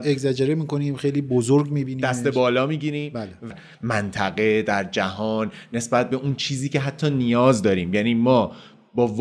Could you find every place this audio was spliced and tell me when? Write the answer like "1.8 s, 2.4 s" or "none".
3.5 s

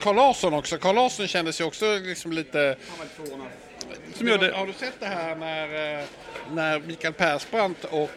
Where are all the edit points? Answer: 4.1 s

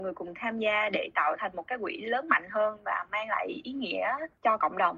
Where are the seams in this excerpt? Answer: none

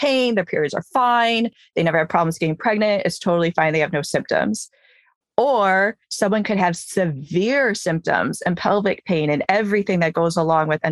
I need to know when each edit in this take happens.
none

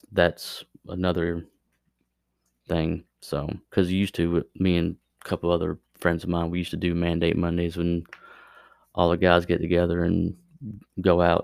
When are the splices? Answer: 3.7 s

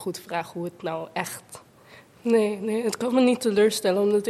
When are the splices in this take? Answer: 2.2 s

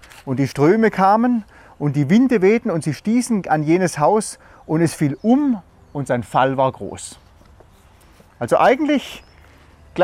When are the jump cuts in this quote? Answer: none

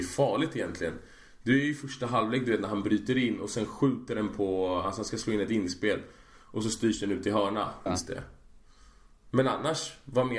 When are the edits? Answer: 7.9 s

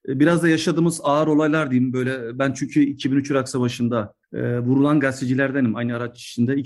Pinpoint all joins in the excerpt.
4.2 s

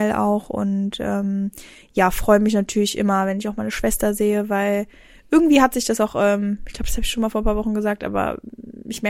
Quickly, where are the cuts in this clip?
none

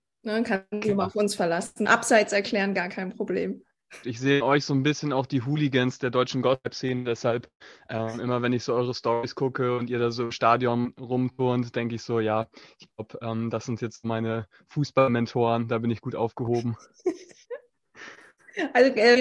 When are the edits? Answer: 4.0 s, 17.4 s

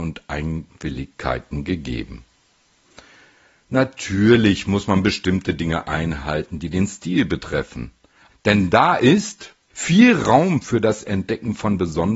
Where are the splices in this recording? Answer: 8.3 s, 9.7 s

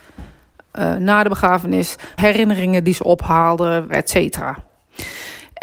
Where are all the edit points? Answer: 2.2 s, 3.9 s

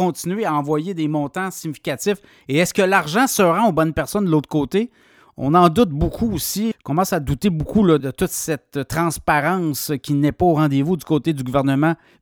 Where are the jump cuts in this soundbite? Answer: 6.7 s, 8.0 s

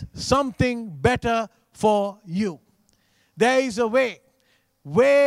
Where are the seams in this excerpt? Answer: none

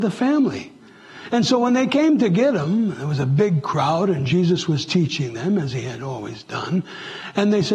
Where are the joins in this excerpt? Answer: none

